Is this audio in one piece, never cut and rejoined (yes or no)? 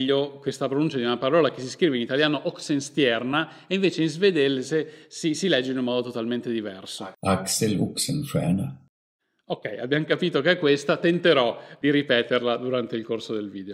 yes